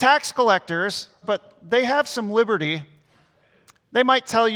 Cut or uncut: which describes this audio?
cut